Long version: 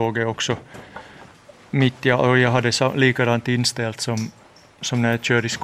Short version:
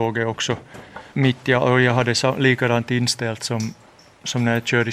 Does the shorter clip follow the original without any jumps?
no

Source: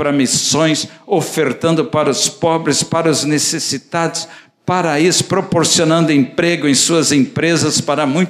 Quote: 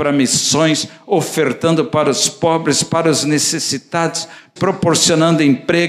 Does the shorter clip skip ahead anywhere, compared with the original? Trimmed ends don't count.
yes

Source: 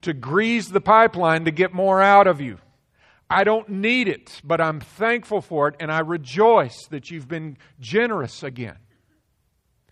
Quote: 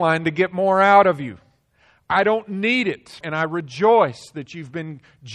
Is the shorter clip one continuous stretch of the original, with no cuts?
no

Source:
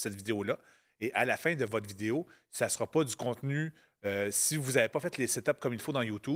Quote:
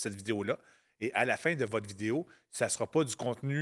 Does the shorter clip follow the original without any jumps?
yes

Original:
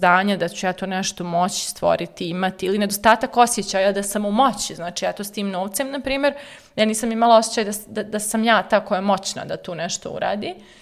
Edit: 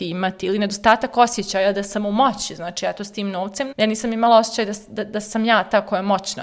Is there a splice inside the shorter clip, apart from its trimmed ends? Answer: yes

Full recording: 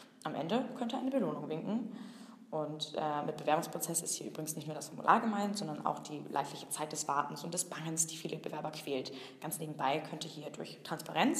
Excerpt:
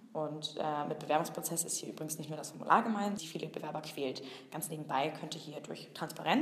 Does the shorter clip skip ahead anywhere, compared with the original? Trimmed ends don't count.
yes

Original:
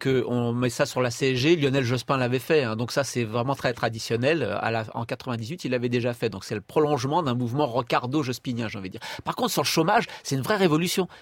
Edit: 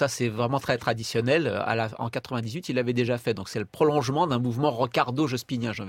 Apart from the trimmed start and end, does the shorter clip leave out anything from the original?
no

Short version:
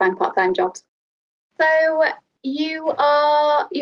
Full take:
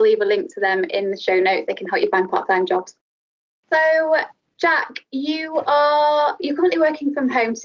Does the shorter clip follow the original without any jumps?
no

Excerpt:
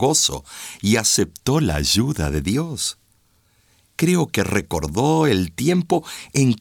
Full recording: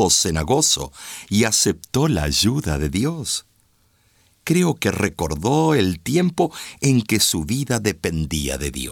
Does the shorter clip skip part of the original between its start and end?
no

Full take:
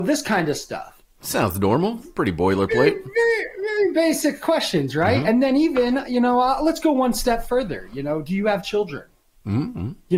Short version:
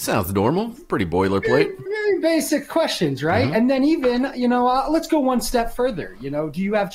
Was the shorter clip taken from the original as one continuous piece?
no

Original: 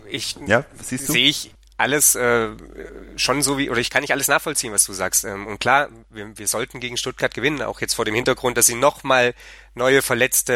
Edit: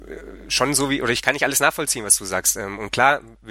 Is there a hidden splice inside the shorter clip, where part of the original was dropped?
no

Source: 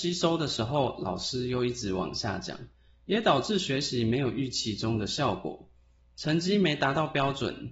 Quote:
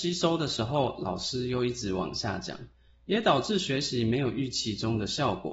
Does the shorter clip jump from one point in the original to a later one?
no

